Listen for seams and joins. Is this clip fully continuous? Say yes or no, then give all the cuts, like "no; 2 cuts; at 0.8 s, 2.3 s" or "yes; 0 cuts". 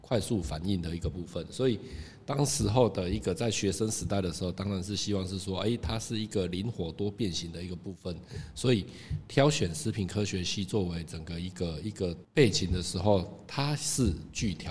yes; 0 cuts